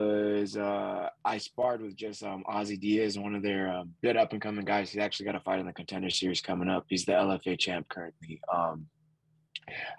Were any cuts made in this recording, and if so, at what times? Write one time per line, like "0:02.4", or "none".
0:04.0